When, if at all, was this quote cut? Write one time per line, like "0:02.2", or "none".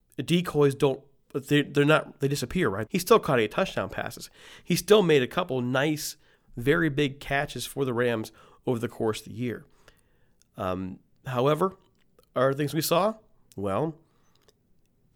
0:02.9